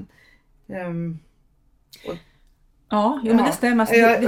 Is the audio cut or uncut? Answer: uncut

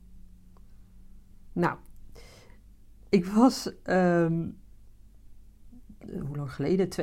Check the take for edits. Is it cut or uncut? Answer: uncut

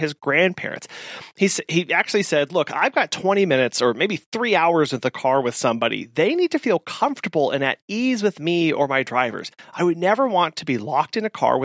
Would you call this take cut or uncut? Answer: uncut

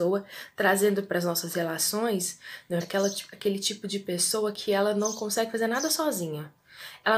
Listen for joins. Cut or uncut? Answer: cut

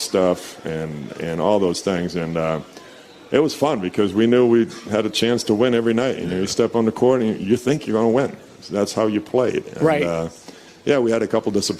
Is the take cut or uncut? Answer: uncut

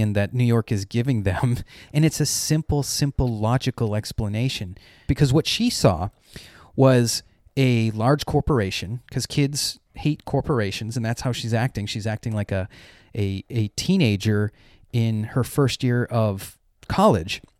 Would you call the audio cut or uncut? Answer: cut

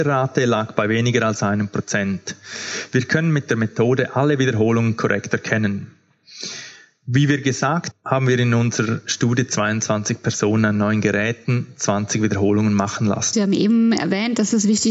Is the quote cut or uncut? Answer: cut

